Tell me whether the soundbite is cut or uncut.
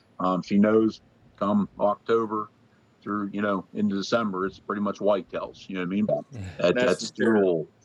cut